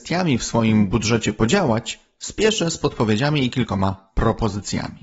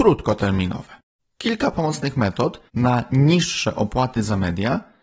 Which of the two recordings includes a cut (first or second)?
second